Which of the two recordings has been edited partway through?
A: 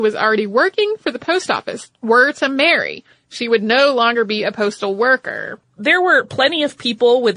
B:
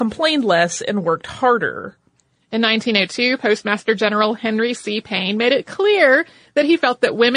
A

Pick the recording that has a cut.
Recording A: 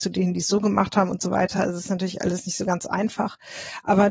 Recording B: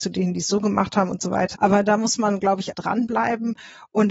B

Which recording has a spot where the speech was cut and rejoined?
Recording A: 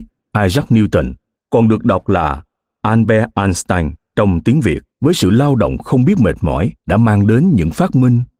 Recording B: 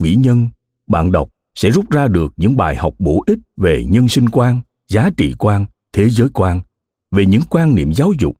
A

